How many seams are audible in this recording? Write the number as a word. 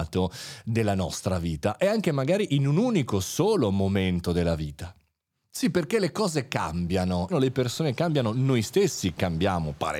one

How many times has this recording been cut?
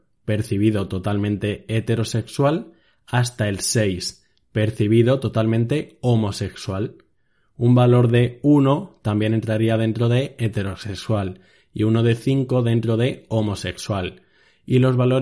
zero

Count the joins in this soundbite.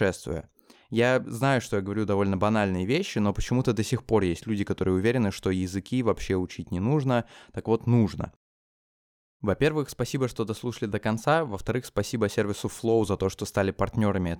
zero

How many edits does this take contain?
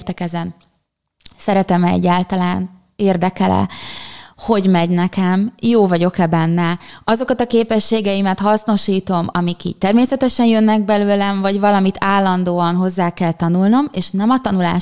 one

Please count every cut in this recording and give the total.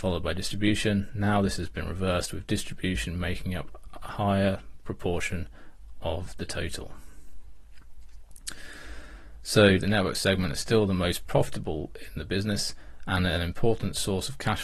one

